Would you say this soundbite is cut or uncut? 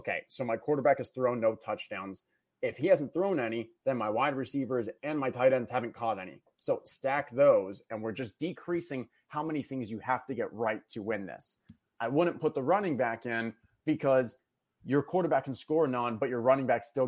uncut